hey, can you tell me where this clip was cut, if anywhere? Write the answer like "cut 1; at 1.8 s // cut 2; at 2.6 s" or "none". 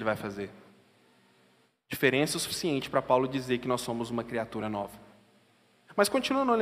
none

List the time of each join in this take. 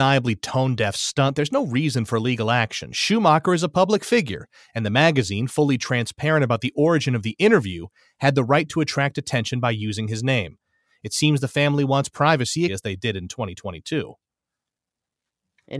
cut 1; at 12.7 s

